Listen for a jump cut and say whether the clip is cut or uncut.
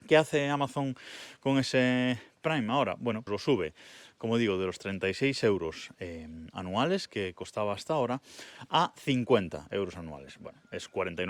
cut